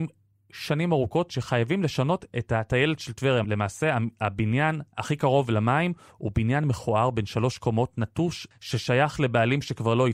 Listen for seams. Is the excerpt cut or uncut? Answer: cut